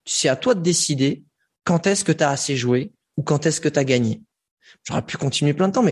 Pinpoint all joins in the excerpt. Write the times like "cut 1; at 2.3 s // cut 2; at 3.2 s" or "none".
cut 1; at 4.8 s